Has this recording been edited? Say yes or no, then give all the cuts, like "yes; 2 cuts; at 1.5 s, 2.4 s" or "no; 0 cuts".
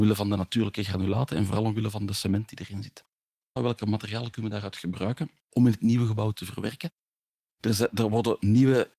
yes; 2 cuts; at 3.6 s, 5.4 s